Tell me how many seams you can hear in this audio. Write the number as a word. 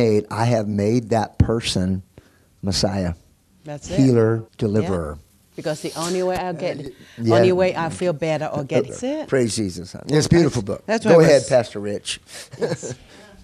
three